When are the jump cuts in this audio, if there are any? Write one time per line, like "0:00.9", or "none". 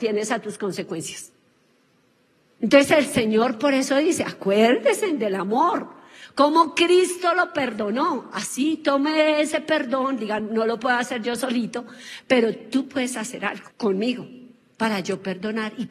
0:10.4
0:13.7